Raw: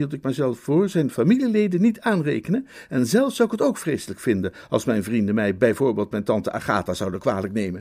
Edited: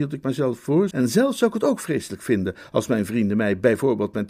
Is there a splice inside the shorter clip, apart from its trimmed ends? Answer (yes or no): yes